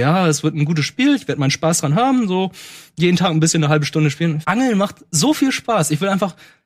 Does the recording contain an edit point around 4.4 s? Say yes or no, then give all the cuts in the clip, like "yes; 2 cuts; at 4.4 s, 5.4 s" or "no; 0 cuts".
yes; 1 cut; at 4.4 s